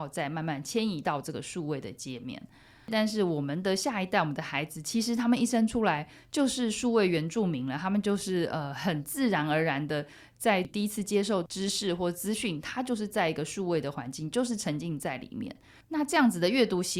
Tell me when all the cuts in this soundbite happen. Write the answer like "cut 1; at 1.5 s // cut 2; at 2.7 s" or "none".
cut 1; at 15.8 s